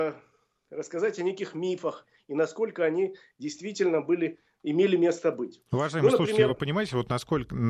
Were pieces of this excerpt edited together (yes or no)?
no